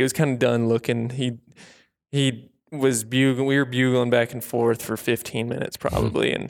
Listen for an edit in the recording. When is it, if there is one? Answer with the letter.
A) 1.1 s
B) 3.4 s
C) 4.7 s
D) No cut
D